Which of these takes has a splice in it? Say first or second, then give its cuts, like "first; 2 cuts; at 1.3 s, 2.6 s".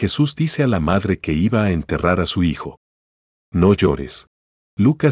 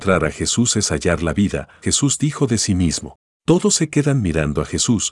second; 2 cuts; at 1.8 s, 3.4 s